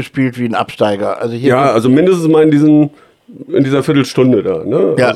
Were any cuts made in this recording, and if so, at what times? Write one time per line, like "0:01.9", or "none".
none

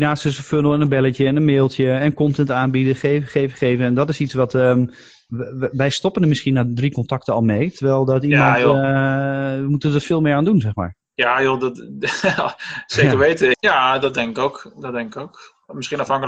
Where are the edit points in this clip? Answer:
0:13.5

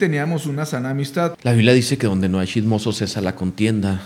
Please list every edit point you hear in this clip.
0:01.3

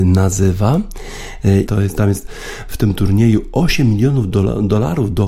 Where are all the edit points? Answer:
0:01.7

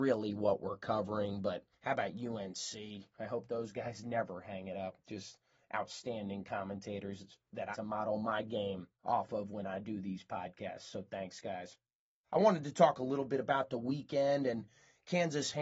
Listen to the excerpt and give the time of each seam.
0:03.1
0:07.7

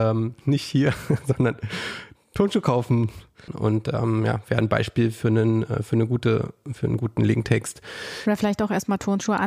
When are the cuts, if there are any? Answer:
0:03.5

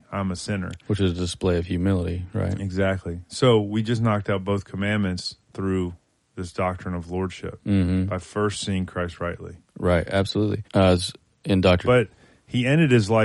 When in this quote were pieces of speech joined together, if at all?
0:10.6
0:11.8

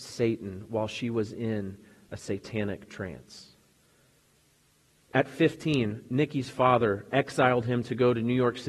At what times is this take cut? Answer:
none

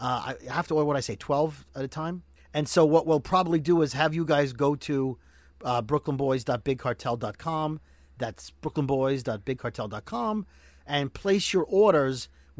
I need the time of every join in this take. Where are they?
0:02.4

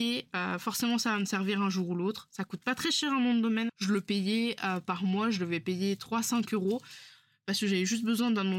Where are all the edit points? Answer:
0:03.7

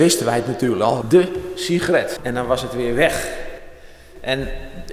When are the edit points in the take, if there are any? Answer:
0:01.0
0:02.2

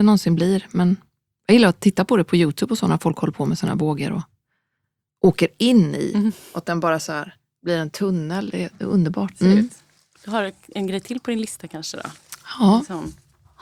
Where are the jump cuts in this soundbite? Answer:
0:09.3

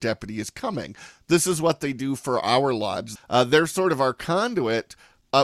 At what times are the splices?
0:03.2

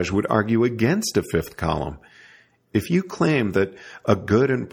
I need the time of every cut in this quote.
none

